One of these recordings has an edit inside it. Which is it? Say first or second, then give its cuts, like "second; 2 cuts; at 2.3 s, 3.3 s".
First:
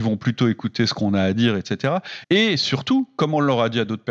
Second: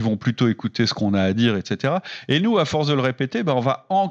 first; 1 cut; at 2.2 s